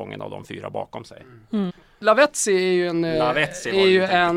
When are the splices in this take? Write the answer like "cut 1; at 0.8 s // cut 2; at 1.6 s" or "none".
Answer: cut 1; at 1.7 s